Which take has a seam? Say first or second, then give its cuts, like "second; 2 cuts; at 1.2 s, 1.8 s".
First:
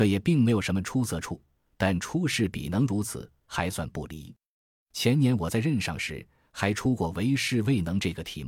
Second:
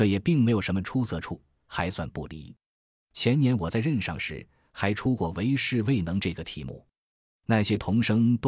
second; 1 cut; at 1.6 s